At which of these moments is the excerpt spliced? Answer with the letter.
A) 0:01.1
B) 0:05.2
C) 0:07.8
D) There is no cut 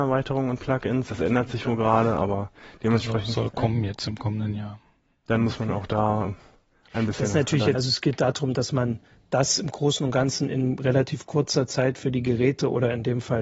C